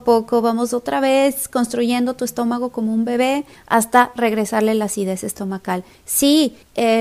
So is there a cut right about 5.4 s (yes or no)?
no